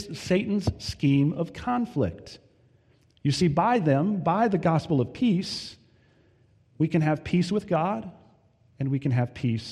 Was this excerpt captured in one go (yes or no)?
yes